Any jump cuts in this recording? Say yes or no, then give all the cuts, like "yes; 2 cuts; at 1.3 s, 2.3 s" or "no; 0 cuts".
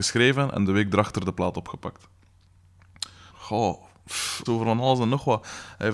yes; 2 cuts; at 3.3 s, 4.5 s